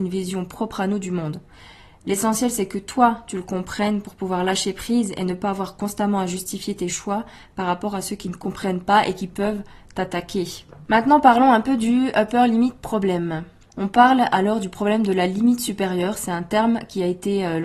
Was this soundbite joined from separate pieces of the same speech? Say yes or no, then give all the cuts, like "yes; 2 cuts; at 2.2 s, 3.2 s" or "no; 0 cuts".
yes; 1 cut; at 13.7 s